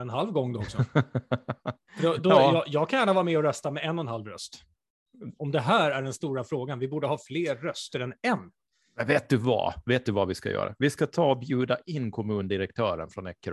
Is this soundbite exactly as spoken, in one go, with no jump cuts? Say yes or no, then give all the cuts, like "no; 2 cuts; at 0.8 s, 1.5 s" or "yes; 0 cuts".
no; 1 cut; at 5.4 s